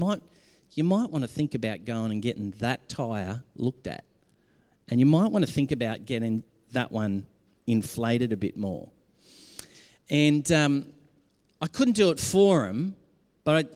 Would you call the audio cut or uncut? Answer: uncut